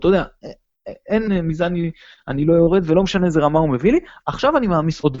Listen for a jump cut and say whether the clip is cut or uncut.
cut